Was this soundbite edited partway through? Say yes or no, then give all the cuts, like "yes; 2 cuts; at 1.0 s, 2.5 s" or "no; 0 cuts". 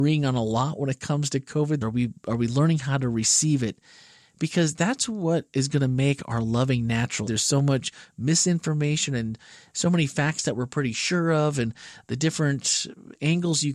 yes; 2 cuts; at 1.8 s, 7.3 s